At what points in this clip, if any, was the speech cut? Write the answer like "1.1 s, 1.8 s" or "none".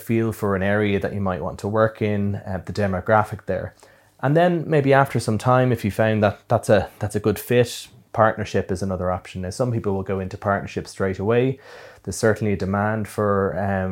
none